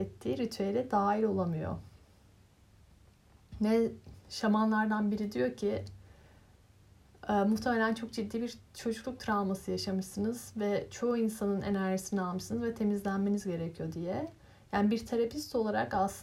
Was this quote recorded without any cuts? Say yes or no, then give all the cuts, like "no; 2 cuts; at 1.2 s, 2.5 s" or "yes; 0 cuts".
yes; 0 cuts